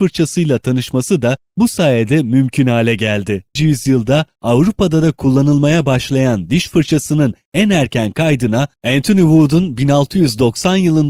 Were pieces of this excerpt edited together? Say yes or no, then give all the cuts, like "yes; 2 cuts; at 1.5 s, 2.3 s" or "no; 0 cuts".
yes; 1 cut; at 3.6 s